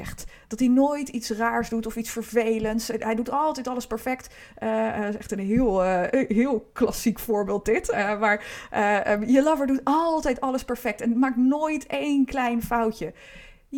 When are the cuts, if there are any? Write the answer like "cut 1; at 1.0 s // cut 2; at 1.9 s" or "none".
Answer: cut 1; at 4.5 s